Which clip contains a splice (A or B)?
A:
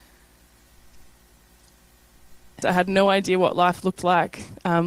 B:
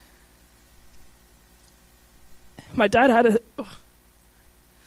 A